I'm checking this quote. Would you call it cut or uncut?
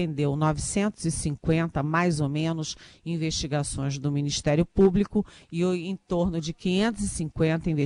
uncut